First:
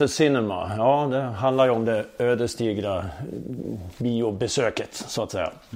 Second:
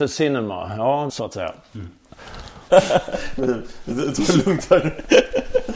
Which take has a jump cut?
second; 2 cuts; at 1.1 s, 2.7 s

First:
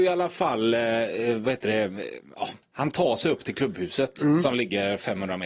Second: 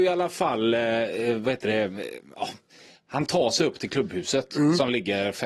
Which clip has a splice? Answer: first; 1 cut; at 2.6 s

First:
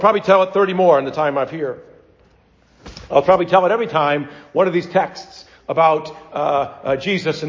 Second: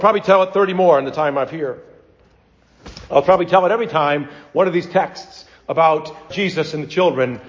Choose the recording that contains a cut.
second; 1 cut; at 6.3 s

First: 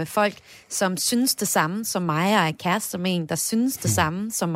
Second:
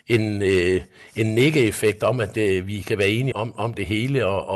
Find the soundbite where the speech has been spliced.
second; 1 cut; at 3.3 s

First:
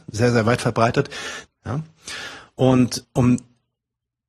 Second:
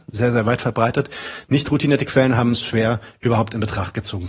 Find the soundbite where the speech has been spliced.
first; 2 cuts; at 1.5 s, 3.0 s

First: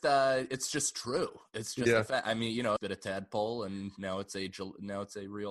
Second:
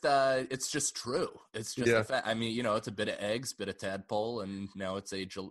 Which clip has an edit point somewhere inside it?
first; 1 cut; at 2.8 s

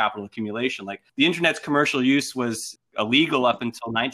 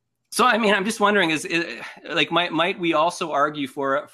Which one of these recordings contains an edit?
first; 2 cuts; at 1.1 s, 2.8 s

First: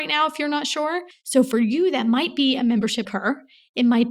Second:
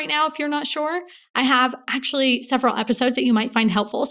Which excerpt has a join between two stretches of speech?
first; 2 cuts; at 1.1 s, 3.0 s

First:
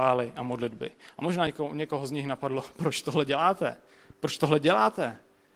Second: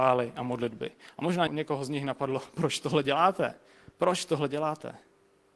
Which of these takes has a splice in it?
second; 2 cuts; at 1.5 s, 3.9 s

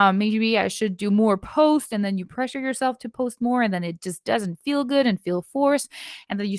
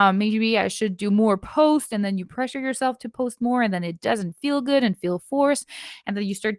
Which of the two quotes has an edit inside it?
second; 1 cut; at 4.0 s

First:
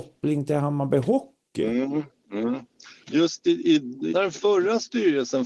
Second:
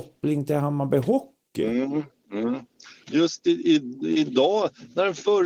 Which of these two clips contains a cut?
first; 1 cut; at 4.1 s

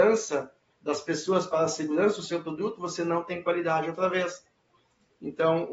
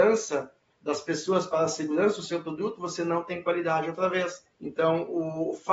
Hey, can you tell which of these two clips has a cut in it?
second; 1 cut; at 4.5 s

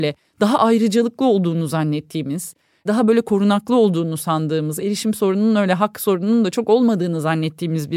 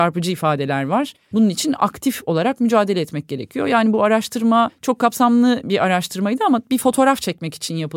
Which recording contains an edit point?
second; 1 cut; at 1.3 s

